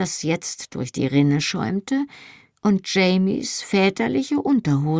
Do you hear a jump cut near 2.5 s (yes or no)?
yes